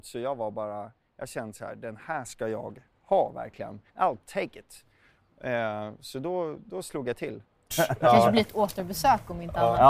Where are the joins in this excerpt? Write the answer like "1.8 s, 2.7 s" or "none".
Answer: 3.9 s, 7.7 s